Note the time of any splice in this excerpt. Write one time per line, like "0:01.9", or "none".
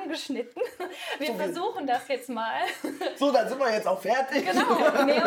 none